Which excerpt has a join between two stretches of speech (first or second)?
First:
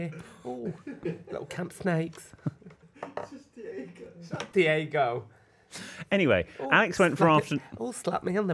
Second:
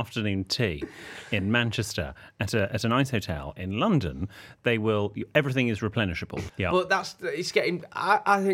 second